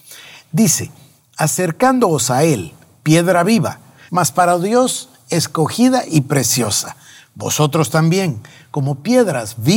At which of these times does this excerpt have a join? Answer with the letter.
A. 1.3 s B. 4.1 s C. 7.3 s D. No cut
B